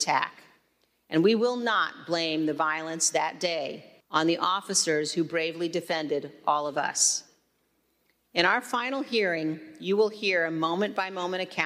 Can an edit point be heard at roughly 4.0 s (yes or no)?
yes